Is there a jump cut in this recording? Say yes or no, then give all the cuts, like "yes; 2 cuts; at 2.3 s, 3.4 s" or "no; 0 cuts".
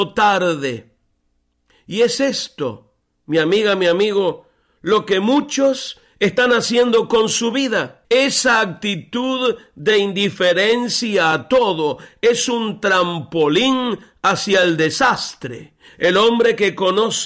yes; 2 cuts; at 8.0 s, 15.9 s